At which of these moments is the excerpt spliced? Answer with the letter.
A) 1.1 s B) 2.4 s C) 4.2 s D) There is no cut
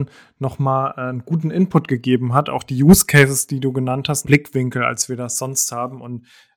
C